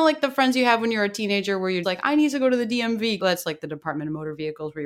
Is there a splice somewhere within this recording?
yes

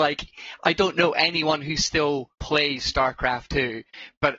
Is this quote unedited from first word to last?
no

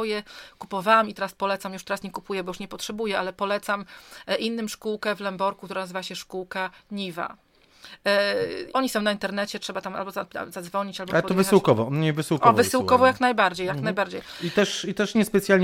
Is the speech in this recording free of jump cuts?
no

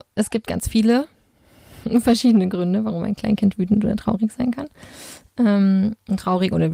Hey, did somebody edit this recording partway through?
no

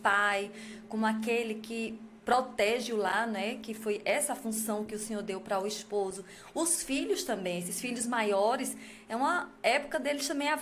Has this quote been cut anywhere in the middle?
no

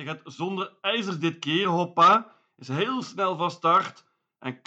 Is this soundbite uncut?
yes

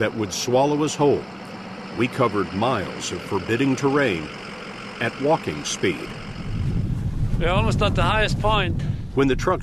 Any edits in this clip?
no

